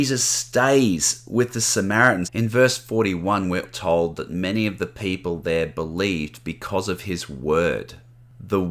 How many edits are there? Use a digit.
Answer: 2